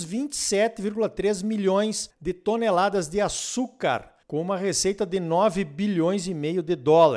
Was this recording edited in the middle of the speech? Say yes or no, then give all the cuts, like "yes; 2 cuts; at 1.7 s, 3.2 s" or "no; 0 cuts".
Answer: yes; 2 cuts; at 2.1 s, 4.2 s